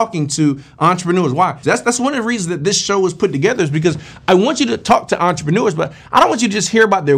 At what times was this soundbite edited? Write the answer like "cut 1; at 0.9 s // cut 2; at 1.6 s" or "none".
cut 1; at 1.6 s